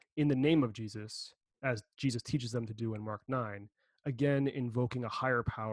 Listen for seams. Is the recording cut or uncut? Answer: uncut